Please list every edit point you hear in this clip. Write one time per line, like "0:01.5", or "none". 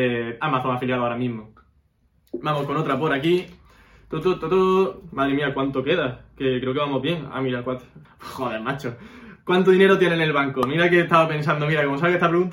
0:08.0